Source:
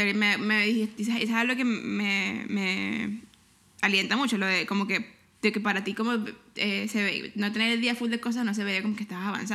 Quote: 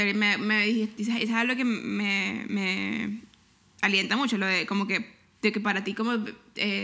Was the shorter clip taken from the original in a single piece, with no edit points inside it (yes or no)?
yes